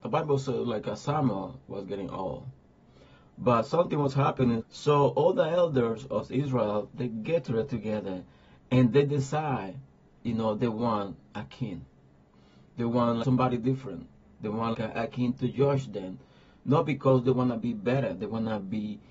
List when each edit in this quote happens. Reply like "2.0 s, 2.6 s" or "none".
4.6 s, 13.2 s, 14.7 s